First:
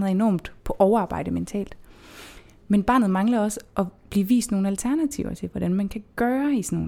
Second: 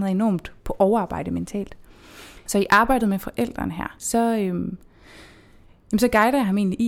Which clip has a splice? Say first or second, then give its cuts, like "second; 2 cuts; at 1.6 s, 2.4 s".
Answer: second; 2 cuts; at 2.5 s, 4.0 s